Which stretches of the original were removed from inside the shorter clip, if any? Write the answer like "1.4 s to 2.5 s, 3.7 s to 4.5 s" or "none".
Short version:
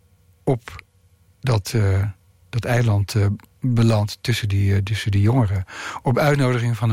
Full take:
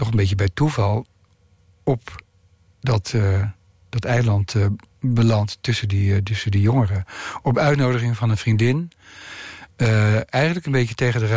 none